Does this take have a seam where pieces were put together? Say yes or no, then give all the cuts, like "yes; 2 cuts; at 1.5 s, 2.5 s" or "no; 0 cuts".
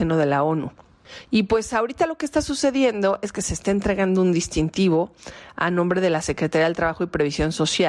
yes; 1 cut; at 1.2 s